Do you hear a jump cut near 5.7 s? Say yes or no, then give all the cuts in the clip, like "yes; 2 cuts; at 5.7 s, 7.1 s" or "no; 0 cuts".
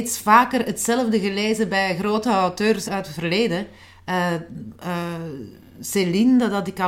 no; 1 cut; at 2.9 s